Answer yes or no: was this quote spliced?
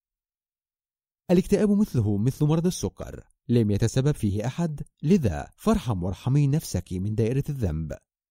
no